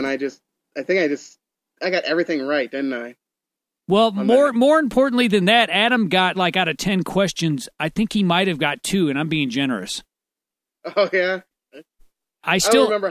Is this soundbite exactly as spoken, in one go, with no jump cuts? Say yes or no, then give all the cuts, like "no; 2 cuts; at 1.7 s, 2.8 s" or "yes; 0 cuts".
yes; 0 cuts